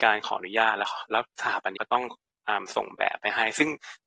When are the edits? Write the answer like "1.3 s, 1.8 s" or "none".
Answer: 1.8 s

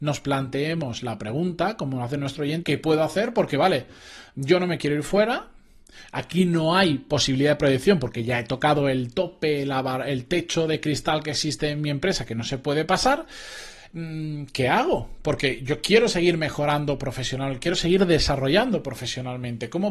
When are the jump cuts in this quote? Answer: 2.6 s

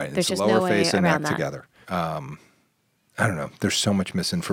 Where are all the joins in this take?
1.8 s

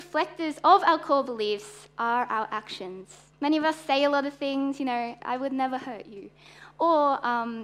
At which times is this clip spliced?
3.3 s, 5.2 s

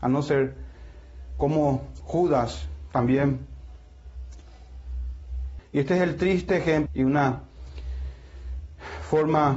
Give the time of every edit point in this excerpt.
5.6 s, 6.9 s

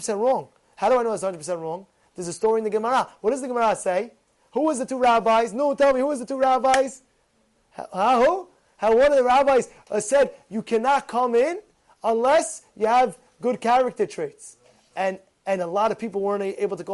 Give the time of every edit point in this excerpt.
none

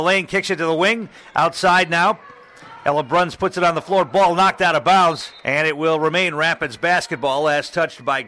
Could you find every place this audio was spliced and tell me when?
5.4 s

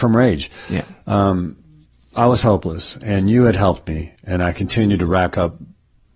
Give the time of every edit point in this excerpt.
none

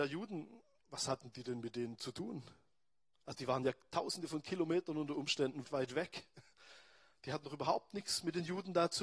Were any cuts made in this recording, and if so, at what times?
5.6 s

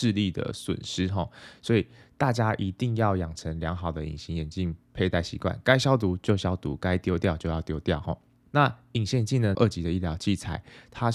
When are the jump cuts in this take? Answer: 8.5 s, 9.6 s

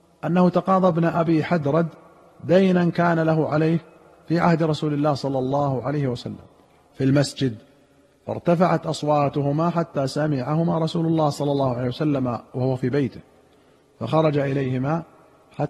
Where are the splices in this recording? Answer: none

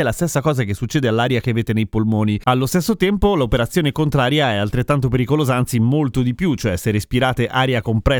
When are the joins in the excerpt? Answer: 2.4 s

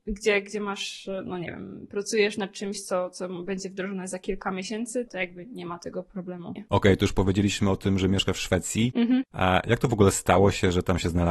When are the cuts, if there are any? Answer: 5.1 s, 6.6 s

